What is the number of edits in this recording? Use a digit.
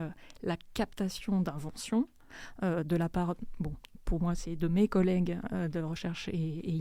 0